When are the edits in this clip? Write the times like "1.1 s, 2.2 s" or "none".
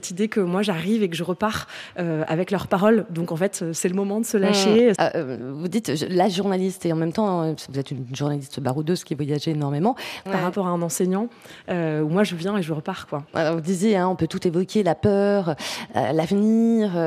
5.0 s, 10.3 s, 13.3 s